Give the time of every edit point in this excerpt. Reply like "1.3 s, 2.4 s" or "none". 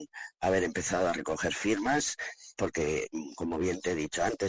2.5 s

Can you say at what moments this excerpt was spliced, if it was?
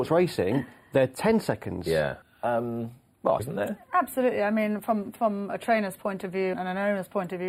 2.2 s, 3.4 s, 6.5 s

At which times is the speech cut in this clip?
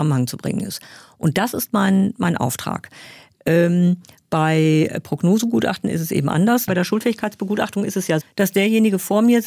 6.7 s, 8.2 s

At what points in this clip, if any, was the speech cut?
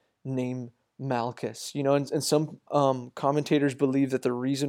2.7 s

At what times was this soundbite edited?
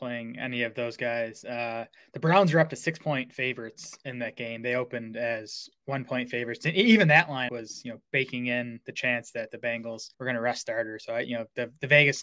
7.5 s, 10.1 s

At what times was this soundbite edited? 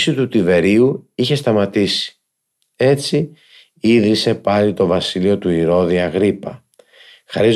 2.6 s

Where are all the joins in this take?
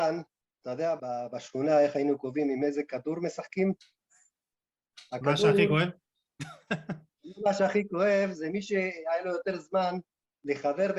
1.0 s

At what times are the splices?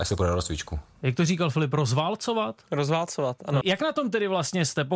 3.6 s

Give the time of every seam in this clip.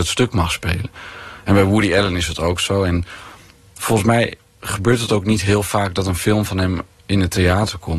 none

